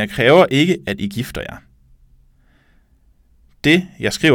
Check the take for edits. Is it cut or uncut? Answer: uncut